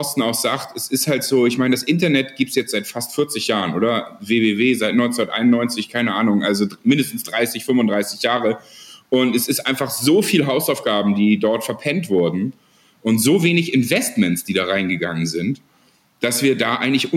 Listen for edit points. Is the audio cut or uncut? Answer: uncut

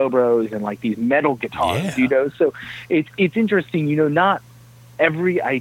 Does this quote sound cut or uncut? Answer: uncut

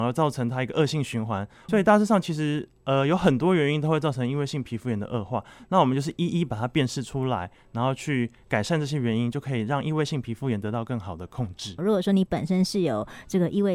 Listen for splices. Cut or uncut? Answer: cut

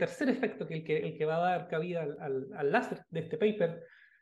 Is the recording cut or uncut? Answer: cut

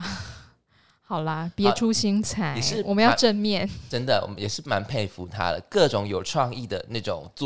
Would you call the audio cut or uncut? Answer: uncut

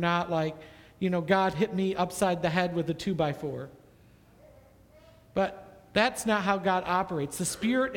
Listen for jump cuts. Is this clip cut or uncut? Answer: uncut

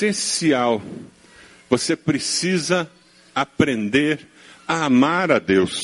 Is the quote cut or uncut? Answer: uncut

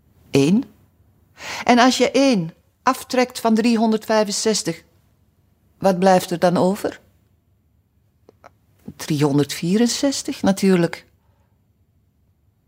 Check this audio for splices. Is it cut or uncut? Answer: uncut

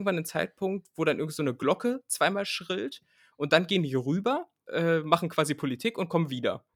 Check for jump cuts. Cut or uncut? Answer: cut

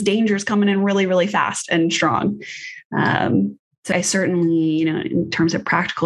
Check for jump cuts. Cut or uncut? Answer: cut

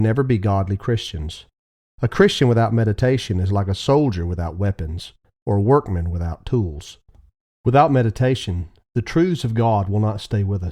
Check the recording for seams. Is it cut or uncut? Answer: uncut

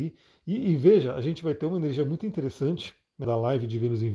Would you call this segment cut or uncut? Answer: cut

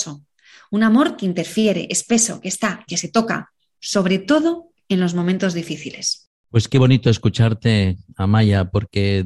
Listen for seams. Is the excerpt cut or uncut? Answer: cut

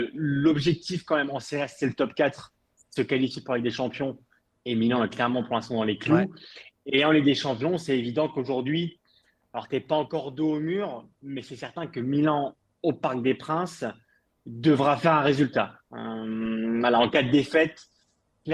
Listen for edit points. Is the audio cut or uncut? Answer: uncut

